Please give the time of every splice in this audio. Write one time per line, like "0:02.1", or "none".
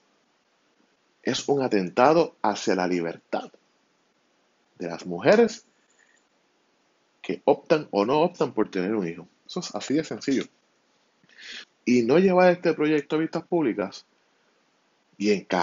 0:09.5
0:11.6

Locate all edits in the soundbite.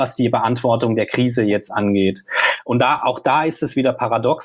none

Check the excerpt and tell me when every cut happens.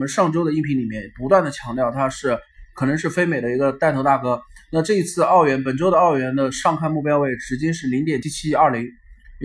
0:08.2

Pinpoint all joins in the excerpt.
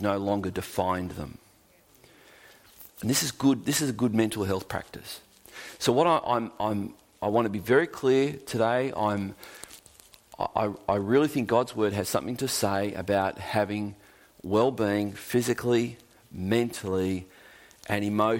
none

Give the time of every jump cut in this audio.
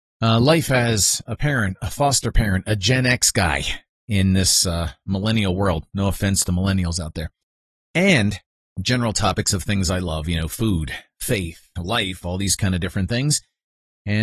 none

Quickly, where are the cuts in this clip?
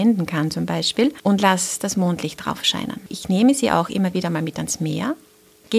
0:03.1

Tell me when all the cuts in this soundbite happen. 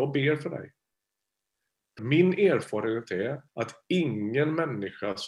0:02.0
0:03.5

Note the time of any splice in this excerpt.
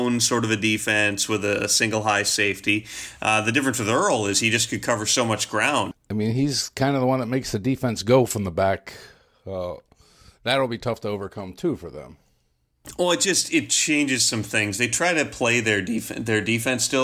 0:05.9

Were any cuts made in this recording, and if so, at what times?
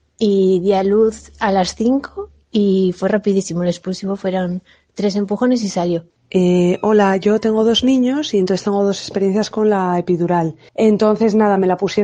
0:06.1
0:10.7

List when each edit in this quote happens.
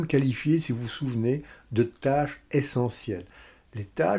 none

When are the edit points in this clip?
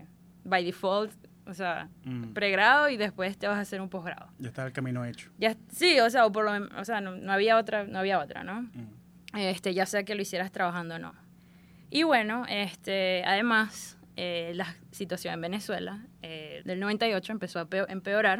0:16.6

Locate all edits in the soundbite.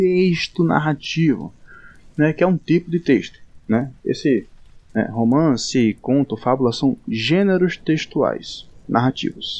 none

